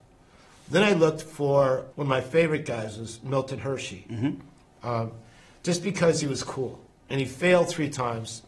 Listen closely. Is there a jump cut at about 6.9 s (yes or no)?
no